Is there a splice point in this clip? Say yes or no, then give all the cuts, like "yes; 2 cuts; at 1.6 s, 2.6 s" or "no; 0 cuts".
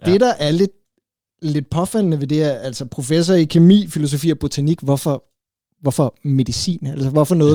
no; 0 cuts